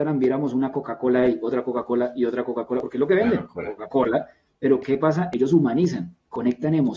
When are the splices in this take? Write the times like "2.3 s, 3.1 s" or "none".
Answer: none